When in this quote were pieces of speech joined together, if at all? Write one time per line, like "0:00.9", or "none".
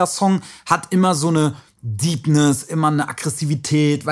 none